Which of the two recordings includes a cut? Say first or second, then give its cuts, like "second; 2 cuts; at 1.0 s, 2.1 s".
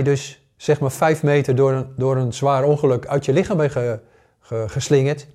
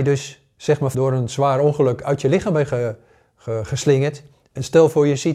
second; 1 cut; at 0.9 s